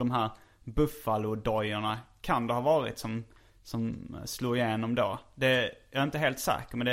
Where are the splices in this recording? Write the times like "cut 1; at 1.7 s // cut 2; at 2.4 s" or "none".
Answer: none